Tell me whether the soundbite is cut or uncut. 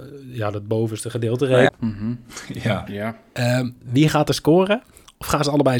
cut